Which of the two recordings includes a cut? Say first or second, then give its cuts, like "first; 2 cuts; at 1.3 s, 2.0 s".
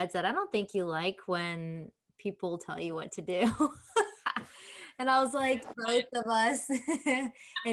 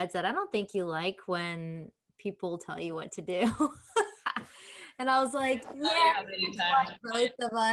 first; 1 cut; at 5.7 s